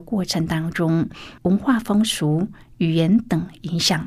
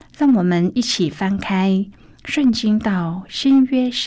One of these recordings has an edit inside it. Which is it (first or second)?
first